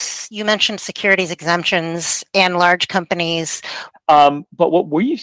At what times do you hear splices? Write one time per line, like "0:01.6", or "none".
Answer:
0:03.9